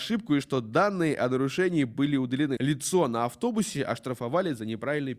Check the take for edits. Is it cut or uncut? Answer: cut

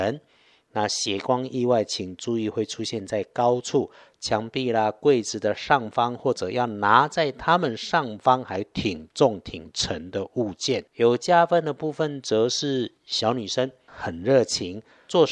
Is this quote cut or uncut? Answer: cut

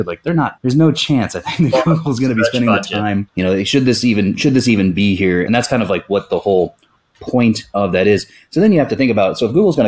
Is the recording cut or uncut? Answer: cut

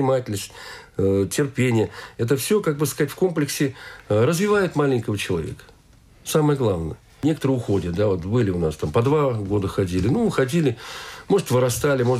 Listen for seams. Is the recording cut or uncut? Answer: uncut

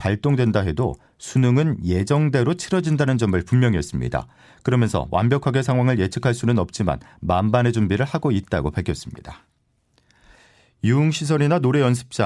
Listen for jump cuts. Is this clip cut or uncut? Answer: uncut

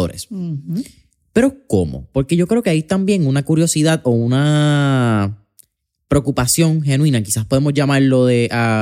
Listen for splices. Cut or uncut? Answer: uncut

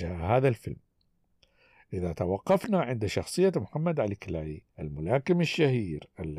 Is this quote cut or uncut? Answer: cut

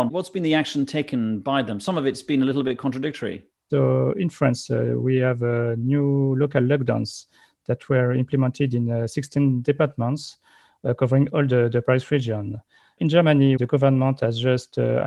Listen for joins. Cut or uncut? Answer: uncut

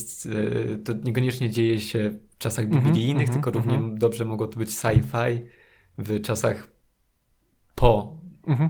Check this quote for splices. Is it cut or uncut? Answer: uncut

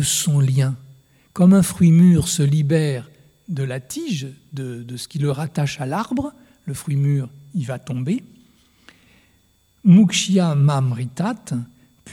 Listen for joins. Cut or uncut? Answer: uncut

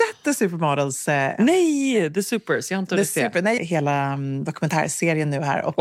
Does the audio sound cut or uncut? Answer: cut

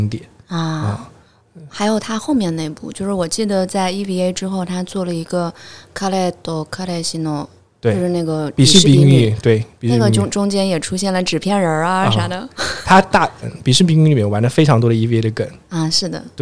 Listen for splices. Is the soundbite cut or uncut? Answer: cut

